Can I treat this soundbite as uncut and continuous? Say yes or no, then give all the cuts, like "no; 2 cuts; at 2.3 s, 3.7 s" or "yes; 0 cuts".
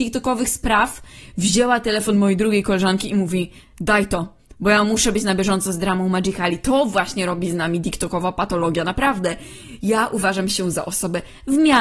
yes; 0 cuts